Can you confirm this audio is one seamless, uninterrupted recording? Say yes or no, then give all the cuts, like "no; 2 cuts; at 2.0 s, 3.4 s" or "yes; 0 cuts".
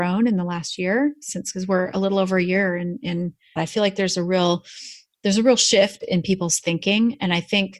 no; 1 cut; at 3.6 s